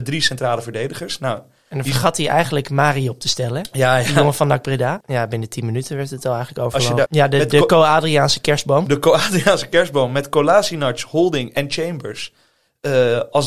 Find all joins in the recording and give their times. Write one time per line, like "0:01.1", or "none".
0:05.0
0:07.1

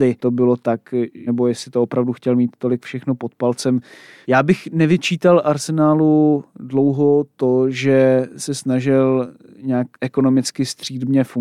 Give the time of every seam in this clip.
0:01.3
0:04.2
0:09.9

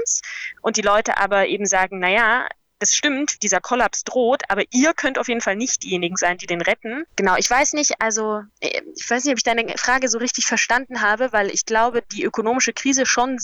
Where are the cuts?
0:03.4

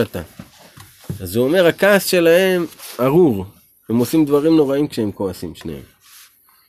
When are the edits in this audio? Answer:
none

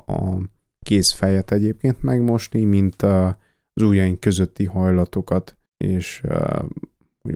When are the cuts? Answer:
0:05.7

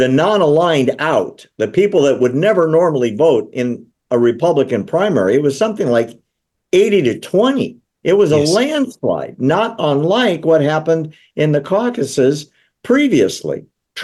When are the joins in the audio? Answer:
none

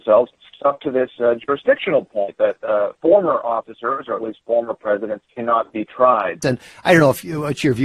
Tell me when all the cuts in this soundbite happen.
0:06.4

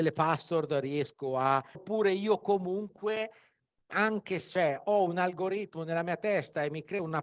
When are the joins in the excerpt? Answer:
0:01.7

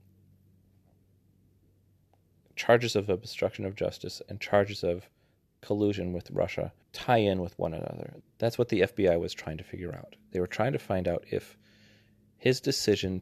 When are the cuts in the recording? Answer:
0:06.8
0:08.2

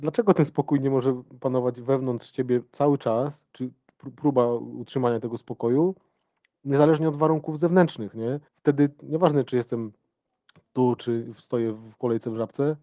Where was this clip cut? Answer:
0:08.5
0:11.0

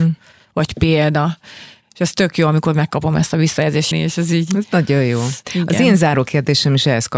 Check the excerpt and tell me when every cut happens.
0:03.9

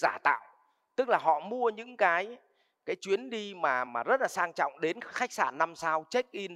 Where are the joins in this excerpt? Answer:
0:03.9

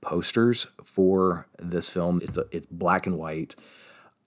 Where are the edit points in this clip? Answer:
0:02.2

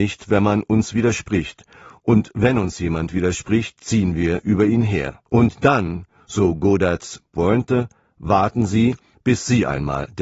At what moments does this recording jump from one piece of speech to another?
0:05.3

